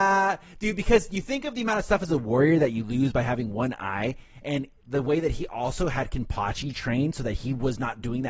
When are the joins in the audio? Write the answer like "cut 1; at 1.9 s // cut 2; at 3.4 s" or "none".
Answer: none